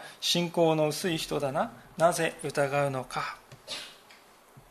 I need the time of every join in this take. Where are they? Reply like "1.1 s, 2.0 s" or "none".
none